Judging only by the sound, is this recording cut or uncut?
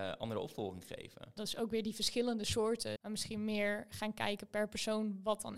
cut